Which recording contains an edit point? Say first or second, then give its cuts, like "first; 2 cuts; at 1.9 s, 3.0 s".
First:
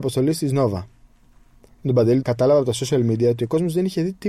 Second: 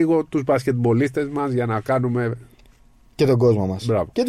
first; 1 cut; at 2.2 s